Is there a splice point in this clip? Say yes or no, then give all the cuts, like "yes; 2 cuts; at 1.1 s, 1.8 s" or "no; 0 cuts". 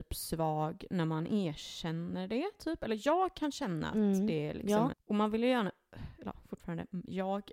yes; 1 cut; at 4.9 s